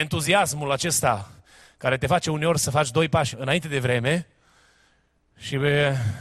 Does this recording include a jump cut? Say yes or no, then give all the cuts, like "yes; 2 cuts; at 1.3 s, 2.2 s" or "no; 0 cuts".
yes; 1 cut; at 3.3 s